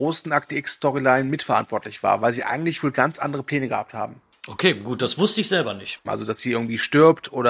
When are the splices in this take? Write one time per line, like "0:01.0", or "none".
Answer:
0:06.0